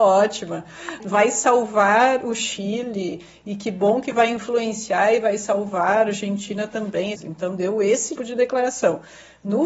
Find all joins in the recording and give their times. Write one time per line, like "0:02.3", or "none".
0:01.0
0:07.1
0:08.2